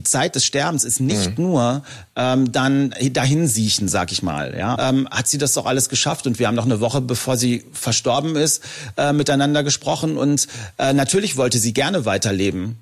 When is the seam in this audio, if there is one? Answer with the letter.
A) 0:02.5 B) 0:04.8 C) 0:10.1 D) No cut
B